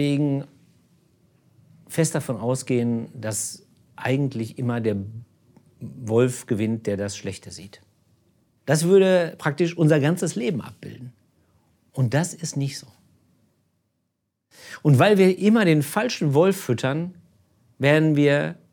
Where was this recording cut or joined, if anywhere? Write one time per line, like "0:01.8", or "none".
0:08.6